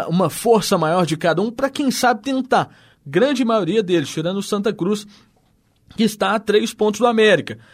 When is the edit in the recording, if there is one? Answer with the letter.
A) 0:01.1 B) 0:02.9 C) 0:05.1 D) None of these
B